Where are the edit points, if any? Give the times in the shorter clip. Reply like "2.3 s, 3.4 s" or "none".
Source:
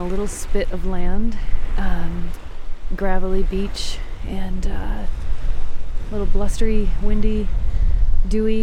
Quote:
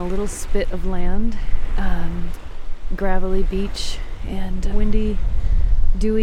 4.7 s